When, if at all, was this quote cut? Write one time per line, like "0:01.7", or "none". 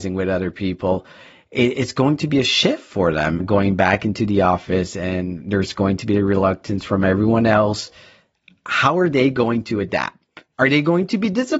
none